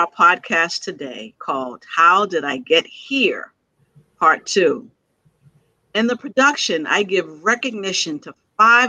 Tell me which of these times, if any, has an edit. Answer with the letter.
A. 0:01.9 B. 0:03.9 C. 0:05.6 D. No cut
D